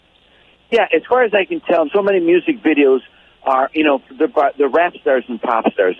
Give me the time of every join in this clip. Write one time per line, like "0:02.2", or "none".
0:01.8

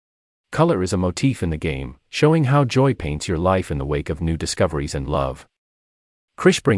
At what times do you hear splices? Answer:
none

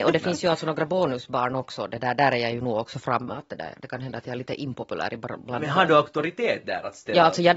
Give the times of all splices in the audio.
none

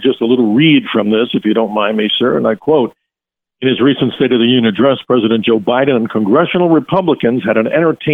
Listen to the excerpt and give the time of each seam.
none

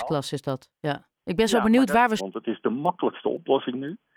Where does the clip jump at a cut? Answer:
0:01.2
0:02.2

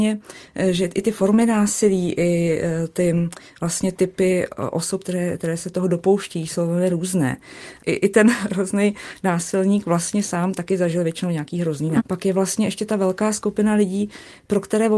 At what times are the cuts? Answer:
0:07.8
0:12.0

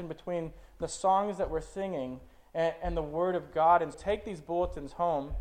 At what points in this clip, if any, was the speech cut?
0:03.9

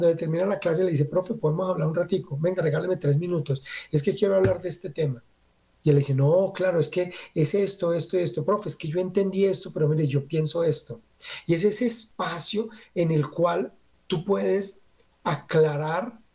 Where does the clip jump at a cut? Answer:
none

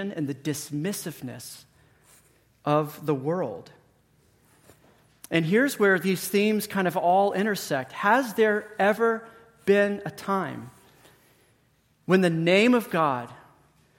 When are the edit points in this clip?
none

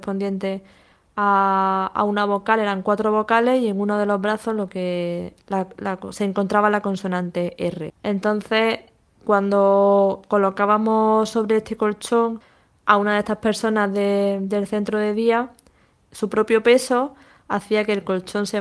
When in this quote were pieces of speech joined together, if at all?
0:07.9

